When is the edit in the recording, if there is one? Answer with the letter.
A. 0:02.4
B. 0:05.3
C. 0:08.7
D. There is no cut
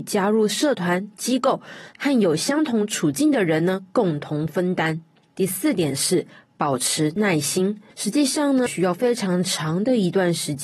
C